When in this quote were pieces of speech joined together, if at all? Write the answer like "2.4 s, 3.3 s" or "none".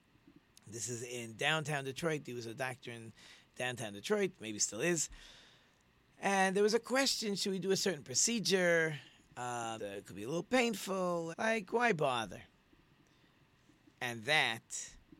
9.8 s, 11.3 s